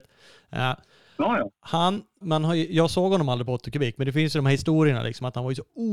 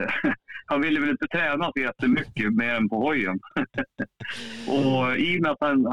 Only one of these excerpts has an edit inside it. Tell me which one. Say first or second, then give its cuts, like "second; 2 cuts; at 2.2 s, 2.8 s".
first; 1 cut; at 2.2 s